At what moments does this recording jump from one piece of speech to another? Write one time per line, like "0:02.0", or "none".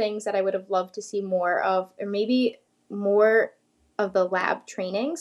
none